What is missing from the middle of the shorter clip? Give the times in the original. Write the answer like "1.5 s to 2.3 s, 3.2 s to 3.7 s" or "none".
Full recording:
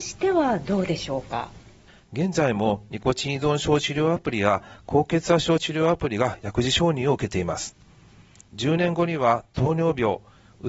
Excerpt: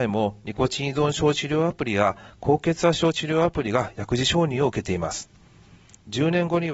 none